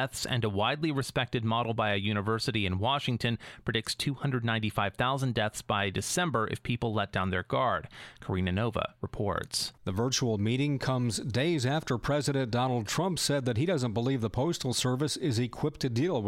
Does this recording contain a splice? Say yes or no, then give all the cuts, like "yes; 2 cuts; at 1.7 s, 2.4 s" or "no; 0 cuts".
yes; 1 cut; at 9.8 s